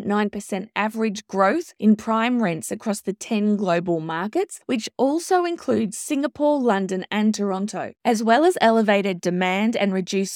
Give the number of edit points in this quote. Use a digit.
0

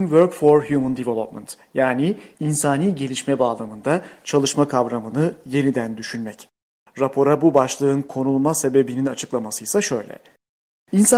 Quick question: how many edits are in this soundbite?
0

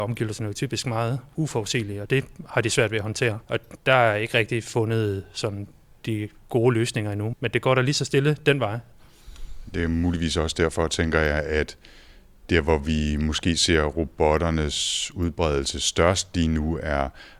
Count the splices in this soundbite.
2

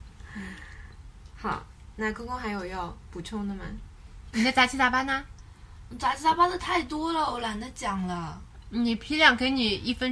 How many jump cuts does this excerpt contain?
1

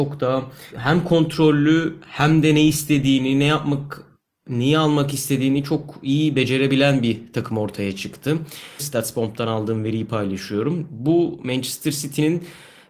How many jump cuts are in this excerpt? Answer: 1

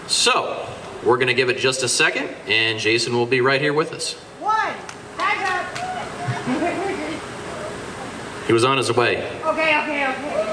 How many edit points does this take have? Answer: 0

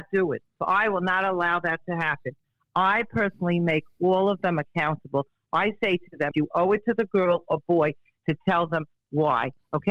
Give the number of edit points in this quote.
1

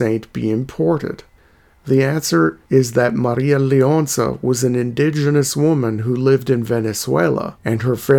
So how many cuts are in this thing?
0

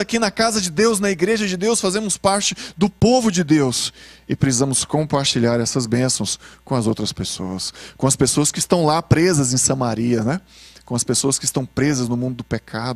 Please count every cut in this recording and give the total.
0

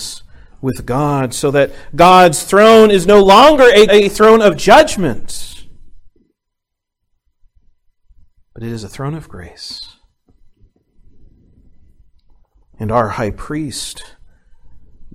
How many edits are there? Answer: 1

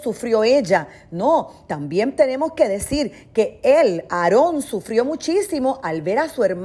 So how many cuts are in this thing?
0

